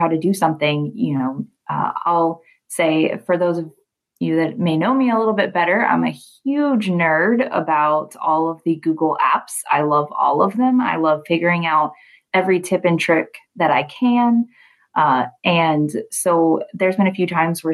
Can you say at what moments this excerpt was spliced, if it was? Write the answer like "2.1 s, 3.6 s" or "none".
none